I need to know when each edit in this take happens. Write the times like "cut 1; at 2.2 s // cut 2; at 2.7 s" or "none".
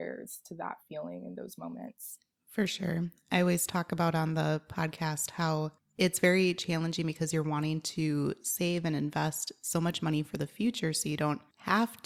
none